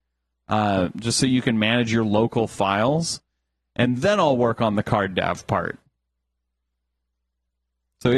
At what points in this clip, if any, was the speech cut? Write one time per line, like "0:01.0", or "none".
none

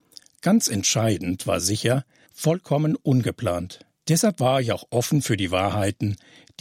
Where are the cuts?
0:02.3
0:04.0

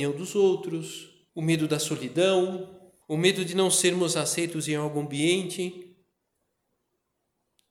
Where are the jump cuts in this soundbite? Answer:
0:01.3
0:03.0

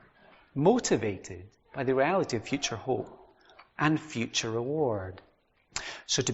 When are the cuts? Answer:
none

